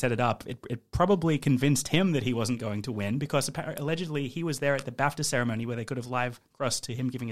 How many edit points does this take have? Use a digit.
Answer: 0